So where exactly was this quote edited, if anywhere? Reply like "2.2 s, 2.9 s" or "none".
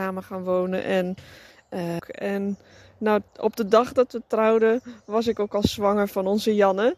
2.0 s, 3.3 s

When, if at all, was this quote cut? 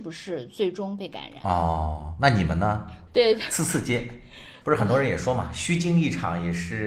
3.1 s, 4.6 s

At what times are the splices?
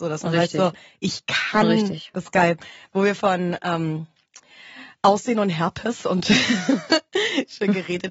2.1 s

